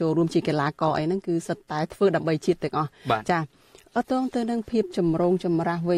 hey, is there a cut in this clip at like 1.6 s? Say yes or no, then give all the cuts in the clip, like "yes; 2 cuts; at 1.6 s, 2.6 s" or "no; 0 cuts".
no; 1 cut; at 4.0 s